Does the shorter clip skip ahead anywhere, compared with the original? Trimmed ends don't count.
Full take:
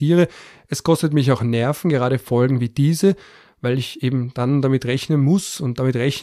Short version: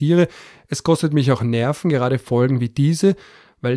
no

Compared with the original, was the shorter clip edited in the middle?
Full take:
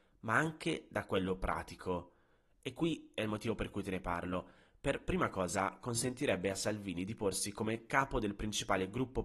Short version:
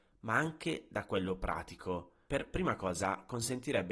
yes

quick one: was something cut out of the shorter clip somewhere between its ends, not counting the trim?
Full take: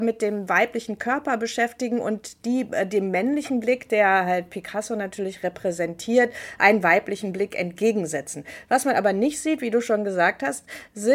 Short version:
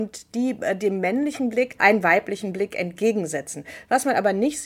yes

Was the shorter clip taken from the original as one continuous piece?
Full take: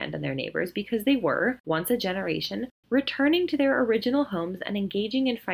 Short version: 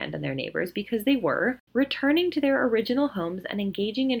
no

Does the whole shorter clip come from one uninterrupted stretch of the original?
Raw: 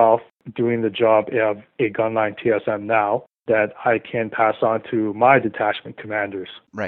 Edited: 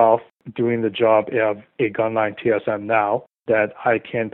yes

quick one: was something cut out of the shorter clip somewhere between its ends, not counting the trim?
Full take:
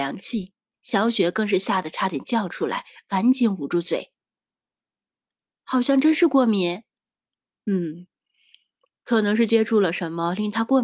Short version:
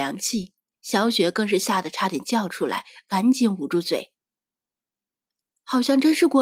no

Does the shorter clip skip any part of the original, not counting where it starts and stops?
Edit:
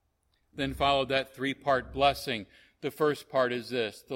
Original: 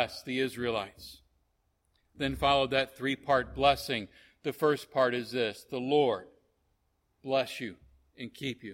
no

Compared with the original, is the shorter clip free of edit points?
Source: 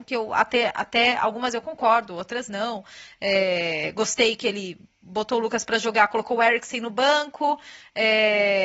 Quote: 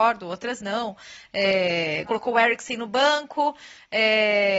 no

